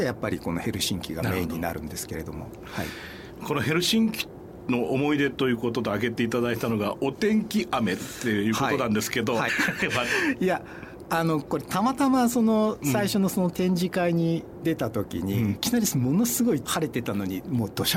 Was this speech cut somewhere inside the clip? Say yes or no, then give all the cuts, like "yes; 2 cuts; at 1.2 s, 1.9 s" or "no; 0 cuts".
yes; 2 cuts; at 9.5 s, 15.6 s